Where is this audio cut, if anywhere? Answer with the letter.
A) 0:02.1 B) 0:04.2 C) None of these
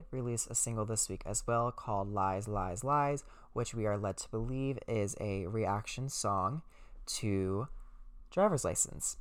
C